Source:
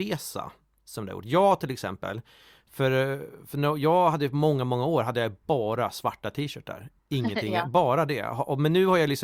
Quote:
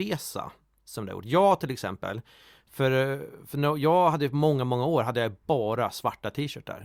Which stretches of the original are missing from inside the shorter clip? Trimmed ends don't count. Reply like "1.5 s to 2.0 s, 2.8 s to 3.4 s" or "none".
none